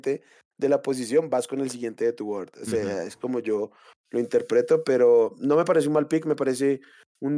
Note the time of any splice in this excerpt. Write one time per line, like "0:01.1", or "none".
none